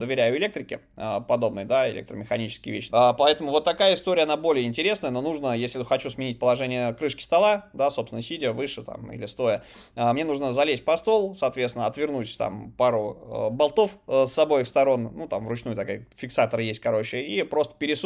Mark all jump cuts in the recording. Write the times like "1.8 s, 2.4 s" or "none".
2.9 s